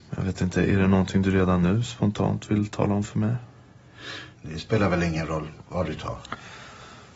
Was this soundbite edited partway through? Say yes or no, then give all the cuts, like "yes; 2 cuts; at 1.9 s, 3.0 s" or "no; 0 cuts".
yes; 1 cut; at 4.4 s